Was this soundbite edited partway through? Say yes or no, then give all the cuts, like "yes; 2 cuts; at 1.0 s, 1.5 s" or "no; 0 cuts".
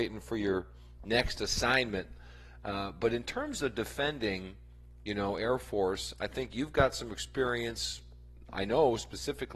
no; 0 cuts